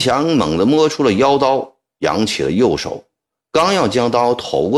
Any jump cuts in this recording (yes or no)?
no